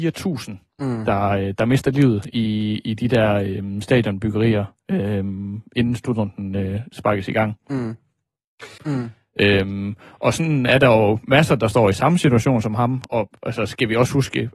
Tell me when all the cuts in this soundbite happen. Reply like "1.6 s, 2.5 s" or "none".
8.8 s, 13.1 s